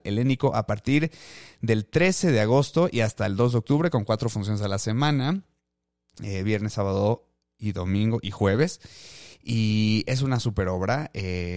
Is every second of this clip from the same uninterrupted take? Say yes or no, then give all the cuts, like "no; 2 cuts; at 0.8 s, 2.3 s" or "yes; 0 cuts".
yes; 0 cuts